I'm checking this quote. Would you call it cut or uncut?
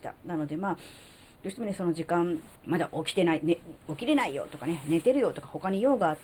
cut